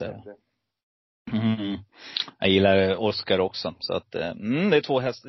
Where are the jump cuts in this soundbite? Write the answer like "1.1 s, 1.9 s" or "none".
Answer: none